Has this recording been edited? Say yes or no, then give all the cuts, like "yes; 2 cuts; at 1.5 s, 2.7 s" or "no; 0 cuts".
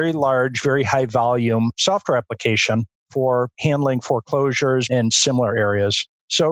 yes; 1 cut; at 4.9 s